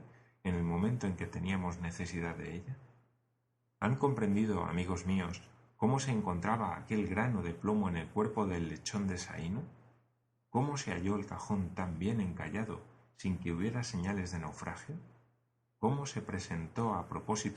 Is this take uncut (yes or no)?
no